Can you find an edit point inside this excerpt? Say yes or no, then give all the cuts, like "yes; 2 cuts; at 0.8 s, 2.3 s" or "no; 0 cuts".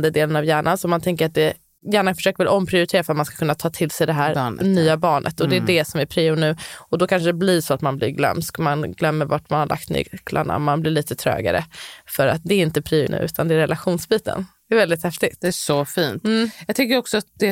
yes; 1 cut; at 13.1 s